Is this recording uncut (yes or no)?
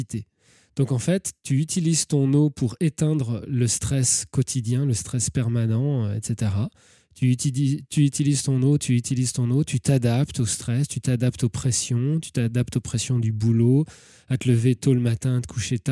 yes